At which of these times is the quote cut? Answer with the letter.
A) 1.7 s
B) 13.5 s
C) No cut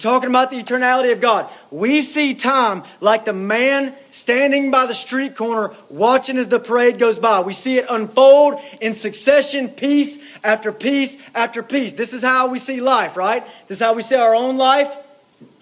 C